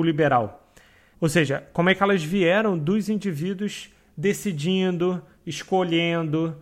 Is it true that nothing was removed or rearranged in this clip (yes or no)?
no